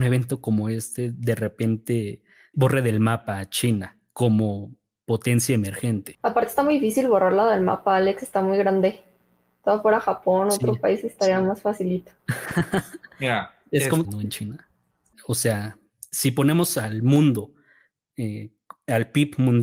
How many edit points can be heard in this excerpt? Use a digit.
3